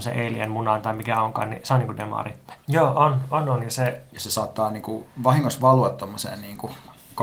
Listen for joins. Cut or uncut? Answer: cut